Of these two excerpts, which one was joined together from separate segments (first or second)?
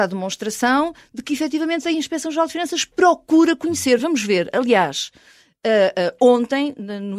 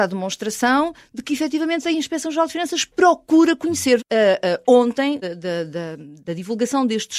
second